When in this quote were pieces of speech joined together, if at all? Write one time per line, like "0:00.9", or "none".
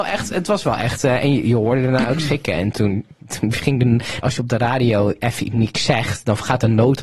0:02.7
0:04.2